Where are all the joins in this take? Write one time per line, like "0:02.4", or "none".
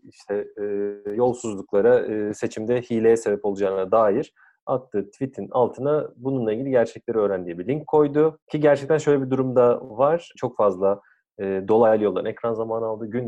0:08.4
0:10.4